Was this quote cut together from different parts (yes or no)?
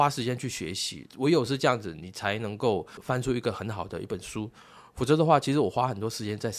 no